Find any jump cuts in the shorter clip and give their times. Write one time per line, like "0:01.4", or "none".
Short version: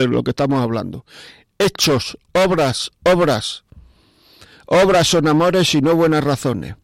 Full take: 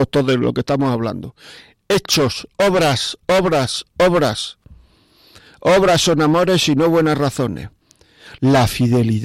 0:02.2